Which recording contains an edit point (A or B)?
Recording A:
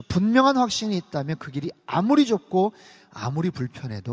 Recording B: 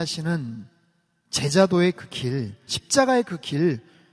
B